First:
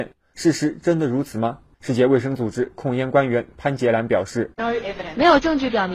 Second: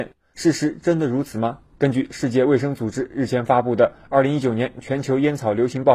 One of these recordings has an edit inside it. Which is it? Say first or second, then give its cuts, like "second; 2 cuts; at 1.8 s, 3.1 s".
first; 1 cut; at 1.7 s